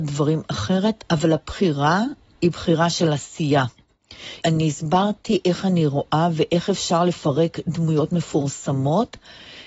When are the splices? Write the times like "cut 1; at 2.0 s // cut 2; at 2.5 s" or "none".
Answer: cut 1; at 4.4 s